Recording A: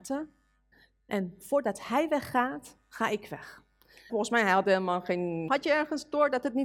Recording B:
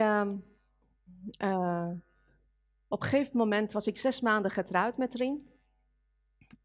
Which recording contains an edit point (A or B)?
A